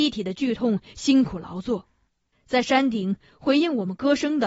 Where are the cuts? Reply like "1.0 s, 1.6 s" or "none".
2.3 s